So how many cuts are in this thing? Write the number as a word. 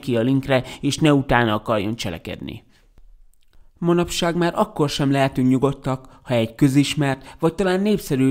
zero